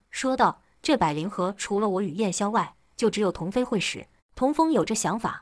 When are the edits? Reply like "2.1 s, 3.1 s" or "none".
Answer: 4.2 s